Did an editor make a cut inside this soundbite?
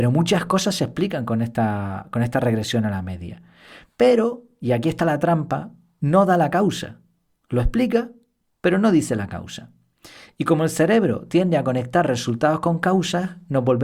no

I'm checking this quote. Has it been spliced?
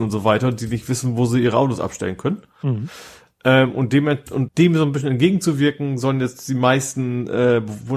yes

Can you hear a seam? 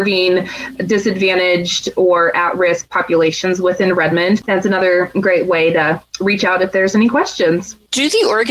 yes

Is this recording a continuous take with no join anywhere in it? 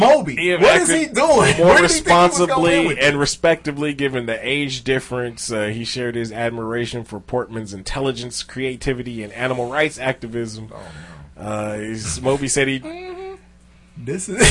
no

